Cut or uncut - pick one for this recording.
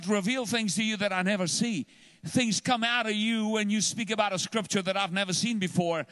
uncut